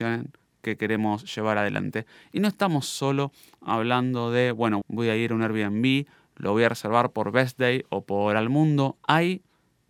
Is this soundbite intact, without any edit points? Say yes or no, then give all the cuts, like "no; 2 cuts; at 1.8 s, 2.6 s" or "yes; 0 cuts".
no; 2 cuts; at 4.8 s, 9.0 s